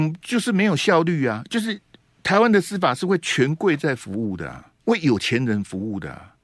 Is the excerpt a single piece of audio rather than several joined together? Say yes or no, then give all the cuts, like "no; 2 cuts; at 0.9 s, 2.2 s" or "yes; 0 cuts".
no; 1 cut; at 4.8 s